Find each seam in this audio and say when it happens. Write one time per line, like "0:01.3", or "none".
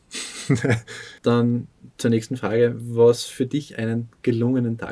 0:01.2

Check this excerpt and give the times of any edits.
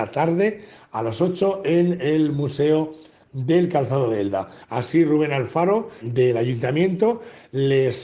0:04.6
0:06.0

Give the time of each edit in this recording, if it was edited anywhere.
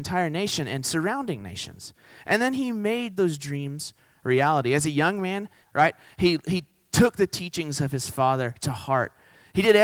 0:05.6

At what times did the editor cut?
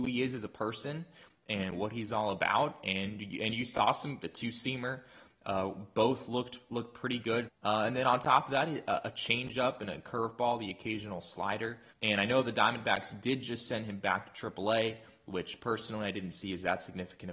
0:04.2
0:07.5
0:11.9

